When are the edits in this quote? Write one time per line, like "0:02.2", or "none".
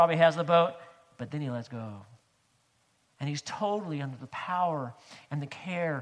none